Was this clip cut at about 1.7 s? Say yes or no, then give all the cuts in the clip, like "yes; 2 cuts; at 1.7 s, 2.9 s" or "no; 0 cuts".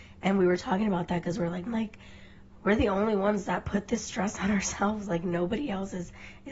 yes; 1 cut; at 1.7 s